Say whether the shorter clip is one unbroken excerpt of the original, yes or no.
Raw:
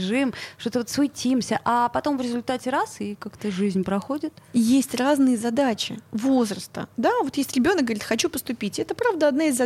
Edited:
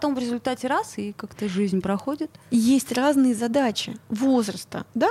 yes